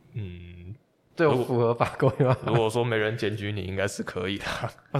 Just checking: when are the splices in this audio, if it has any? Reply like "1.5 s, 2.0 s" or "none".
none